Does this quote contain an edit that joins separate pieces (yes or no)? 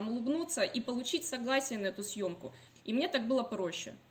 yes